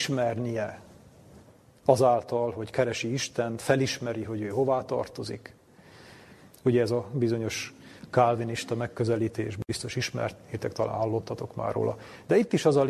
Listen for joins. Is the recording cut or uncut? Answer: uncut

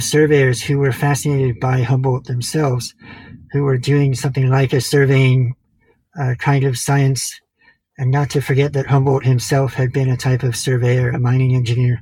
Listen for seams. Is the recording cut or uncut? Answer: uncut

